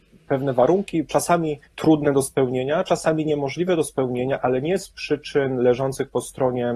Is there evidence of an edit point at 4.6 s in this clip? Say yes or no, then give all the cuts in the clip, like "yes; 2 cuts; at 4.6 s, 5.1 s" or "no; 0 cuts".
no; 1 cut; at 1.7 s